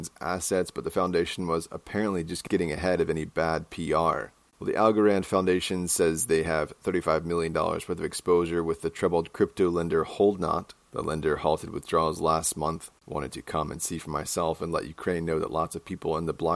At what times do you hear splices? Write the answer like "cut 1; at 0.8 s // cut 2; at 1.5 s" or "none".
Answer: cut 1; at 4.5 s // cut 2; at 12.9 s